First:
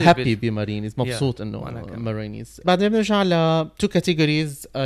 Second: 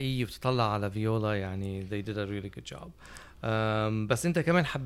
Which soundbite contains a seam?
first; 1 cut; at 2.6 s

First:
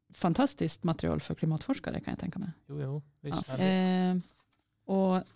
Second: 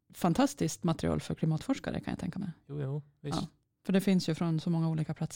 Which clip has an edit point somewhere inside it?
first; 1 cut; at 3.4 s

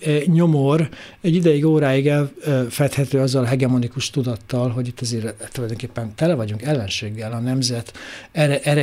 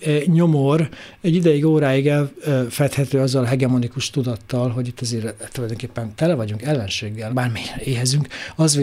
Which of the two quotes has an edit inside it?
second; 1 cut; at 7.3 s

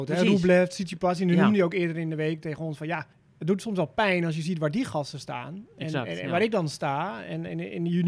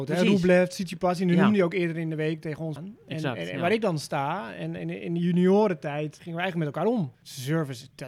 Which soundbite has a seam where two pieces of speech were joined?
second; 2 cuts; at 2.8 s, 7.1 s

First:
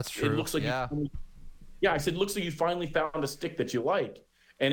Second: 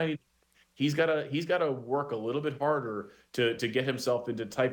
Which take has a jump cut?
second; 1 cut; at 3.6 s

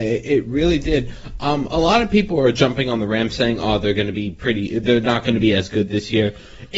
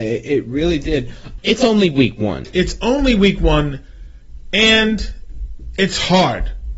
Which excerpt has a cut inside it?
second; 2 cuts; at 1.4 s, 2.4 s

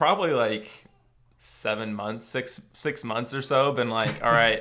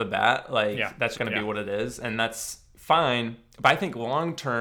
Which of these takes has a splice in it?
second; 1 cut; at 1.1 s

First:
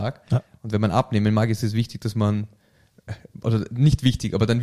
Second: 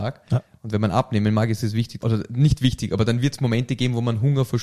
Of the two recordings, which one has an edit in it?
second; 1 cut; at 2.0 s

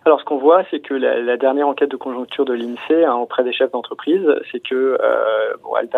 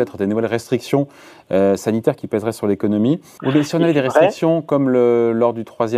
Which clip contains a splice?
second; 1 cut; at 3.4 s

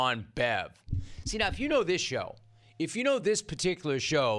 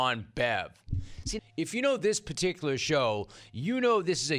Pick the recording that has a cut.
second; 1 cut; at 1.4 s

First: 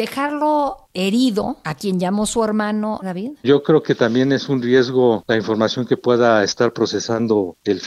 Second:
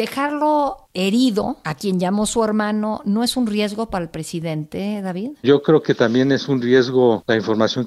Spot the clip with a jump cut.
first; 1 cut; at 3.0 s

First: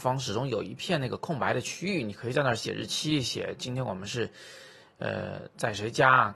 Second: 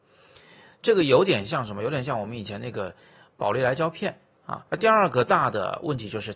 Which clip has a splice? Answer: second; 1 cut; at 4.7 s

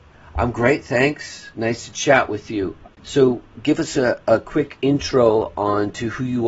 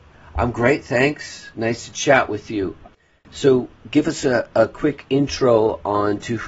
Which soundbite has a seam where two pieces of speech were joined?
first; 1 cut; at 2.9 s

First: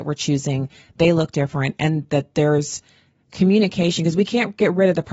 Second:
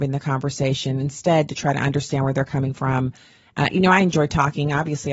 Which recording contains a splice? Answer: second; 1 cut; at 3.7 s

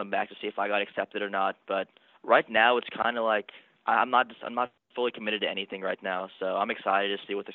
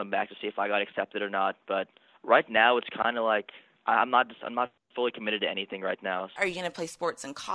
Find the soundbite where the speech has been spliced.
second; 1 cut; at 6.4 s

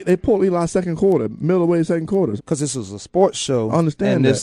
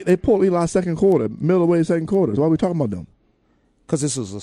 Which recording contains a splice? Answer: first; 1 cut; at 2.4 s

